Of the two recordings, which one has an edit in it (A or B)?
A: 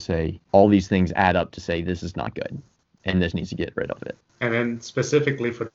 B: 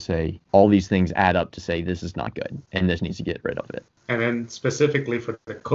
B